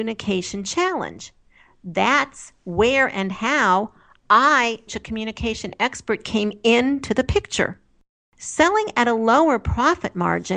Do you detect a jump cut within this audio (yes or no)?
yes